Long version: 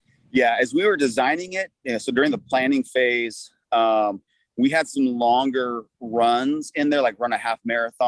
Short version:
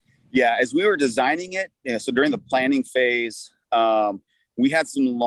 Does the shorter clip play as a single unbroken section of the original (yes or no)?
yes